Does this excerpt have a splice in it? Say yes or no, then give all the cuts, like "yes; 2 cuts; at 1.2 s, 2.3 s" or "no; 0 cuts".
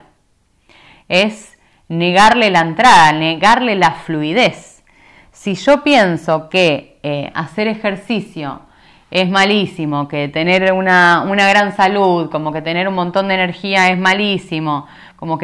no; 0 cuts